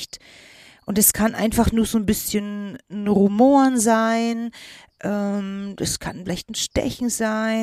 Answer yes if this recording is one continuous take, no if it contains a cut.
yes